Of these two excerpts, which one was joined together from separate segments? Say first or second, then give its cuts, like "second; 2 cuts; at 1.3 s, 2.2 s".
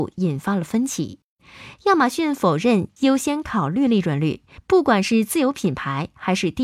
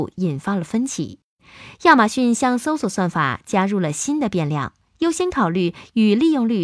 first; 2 cuts; at 1.7 s, 4.6 s